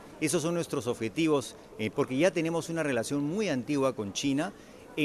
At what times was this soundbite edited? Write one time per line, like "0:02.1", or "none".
0:01.9